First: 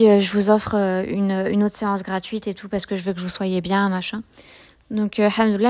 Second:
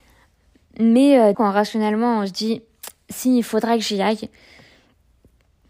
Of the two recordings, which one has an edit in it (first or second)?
second